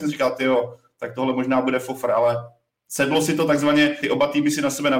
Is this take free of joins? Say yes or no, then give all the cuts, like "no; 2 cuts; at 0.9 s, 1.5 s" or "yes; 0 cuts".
no; 1 cut; at 4.0 s